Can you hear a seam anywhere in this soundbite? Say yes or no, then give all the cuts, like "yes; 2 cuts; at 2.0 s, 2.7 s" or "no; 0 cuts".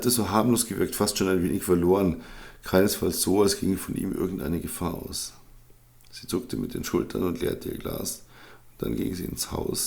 no; 0 cuts